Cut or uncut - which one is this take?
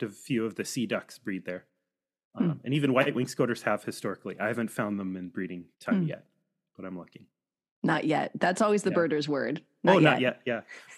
cut